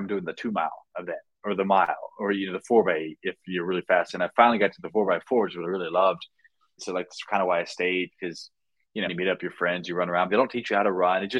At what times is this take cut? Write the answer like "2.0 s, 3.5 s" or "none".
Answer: 6.8 s, 9.1 s, 10.3 s